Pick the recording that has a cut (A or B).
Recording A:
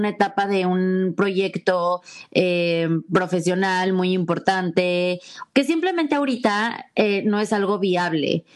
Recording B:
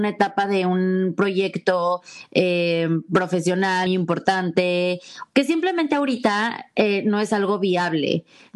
B